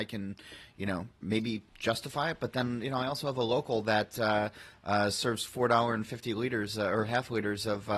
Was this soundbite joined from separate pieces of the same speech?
no; 0 cuts

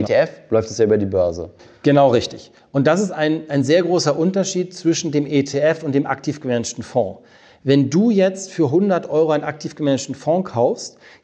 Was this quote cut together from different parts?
no; 0 cuts

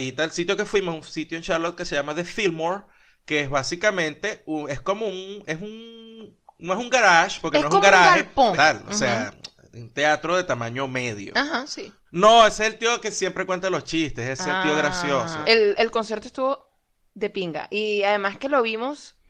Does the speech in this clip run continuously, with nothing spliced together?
no; 3 cuts; at 8.5 s, 12.1 s, 15.4 s

